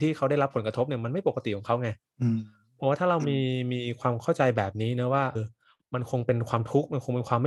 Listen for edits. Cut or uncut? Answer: cut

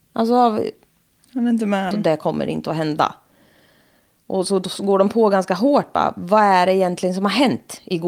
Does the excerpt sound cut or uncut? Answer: cut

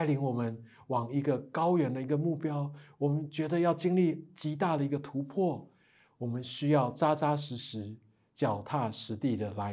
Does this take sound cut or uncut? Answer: uncut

